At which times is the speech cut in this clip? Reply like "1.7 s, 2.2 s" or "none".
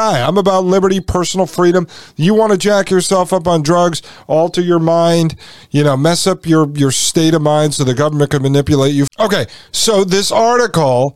9.1 s

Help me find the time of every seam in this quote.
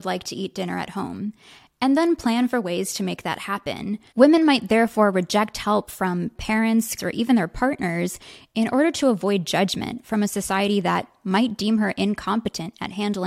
4.1 s, 7.0 s

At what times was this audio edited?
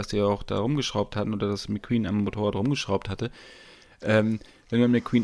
none

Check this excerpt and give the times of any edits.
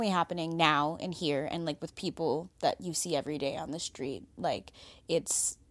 none

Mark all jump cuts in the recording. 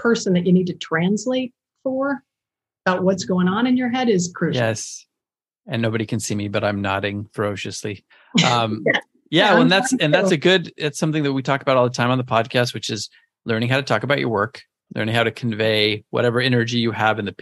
none

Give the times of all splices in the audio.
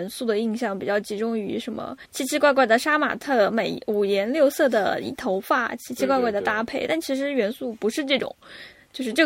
2.0 s

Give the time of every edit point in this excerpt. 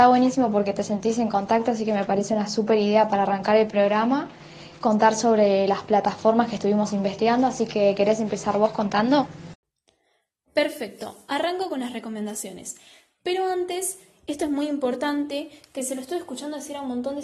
none

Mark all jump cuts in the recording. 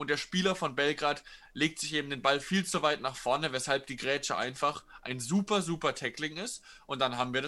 none

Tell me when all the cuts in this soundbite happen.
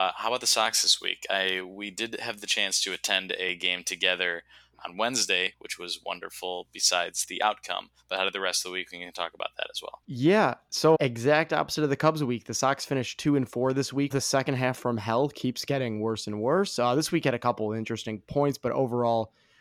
8.1 s, 10.9 s, 14.1 s

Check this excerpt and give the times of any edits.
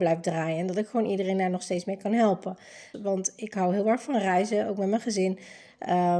2.9 s

